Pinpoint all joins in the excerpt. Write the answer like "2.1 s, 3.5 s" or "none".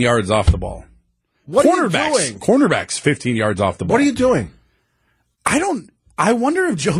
none